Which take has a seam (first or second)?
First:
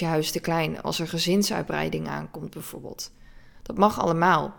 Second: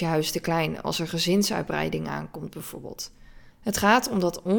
second